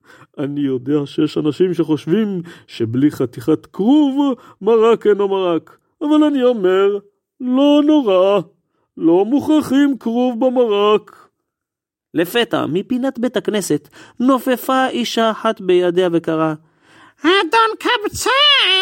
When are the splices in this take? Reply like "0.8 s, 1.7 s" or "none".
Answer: none